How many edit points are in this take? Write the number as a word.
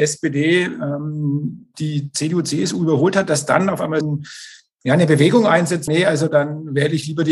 two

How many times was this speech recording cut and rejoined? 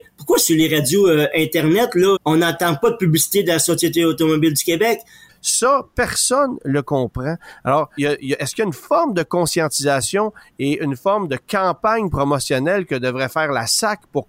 three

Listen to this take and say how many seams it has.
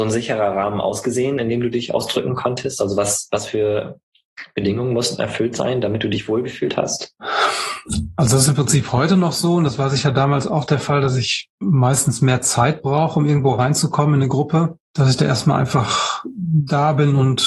zero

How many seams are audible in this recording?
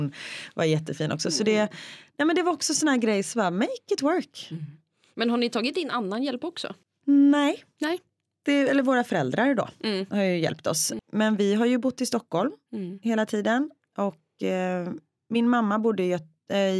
zero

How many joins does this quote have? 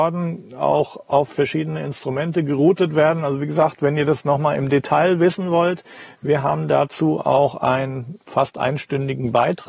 one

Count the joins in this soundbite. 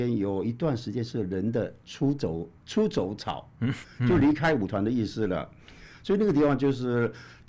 two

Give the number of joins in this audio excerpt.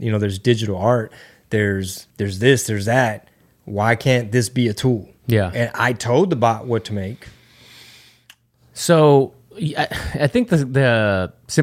one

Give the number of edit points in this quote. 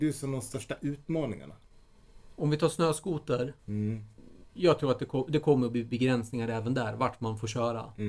one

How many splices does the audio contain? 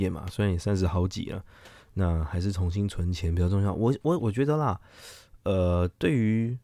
one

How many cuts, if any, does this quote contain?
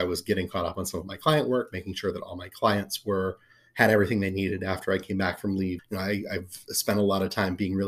one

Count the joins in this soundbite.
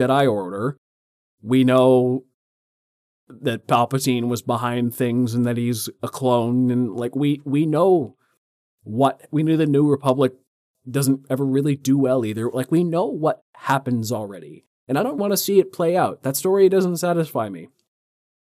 one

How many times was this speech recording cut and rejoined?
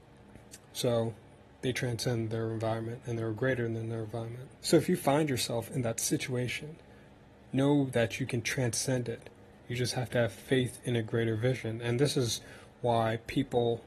one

